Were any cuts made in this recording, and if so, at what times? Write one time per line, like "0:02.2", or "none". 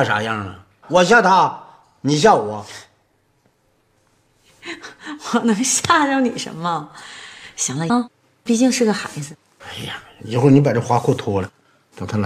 0:07.9